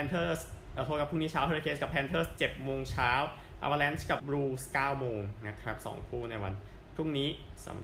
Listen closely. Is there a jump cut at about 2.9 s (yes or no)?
no